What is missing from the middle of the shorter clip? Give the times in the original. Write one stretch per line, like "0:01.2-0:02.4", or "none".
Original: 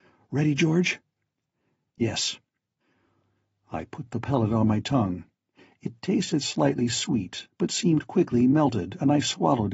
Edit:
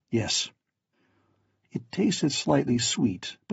0:03.5-0:05.7